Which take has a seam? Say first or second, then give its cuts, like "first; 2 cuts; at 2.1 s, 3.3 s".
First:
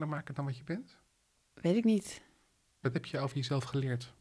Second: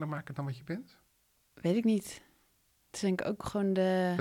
first; 1 cut; at 2.8 s